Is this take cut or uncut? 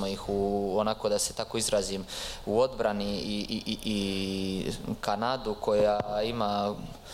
uncut